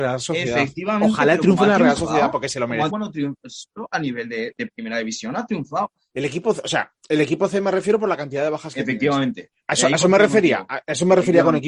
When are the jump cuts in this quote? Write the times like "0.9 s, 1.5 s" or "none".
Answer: 2.9 s, 6.1 s